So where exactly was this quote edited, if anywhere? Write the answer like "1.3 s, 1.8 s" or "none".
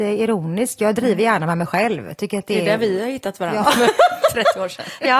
none